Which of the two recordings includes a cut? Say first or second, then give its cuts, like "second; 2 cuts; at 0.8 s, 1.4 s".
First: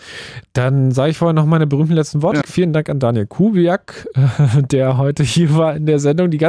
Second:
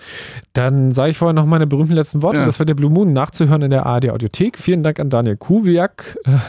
first; 1 cut; at 2.4 s